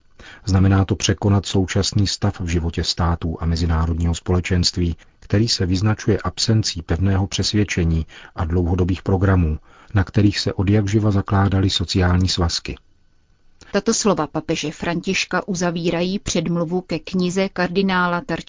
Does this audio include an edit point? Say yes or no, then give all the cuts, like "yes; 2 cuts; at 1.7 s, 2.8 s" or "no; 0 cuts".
yes; 2 cuts; at 9.8 s, 13.7 s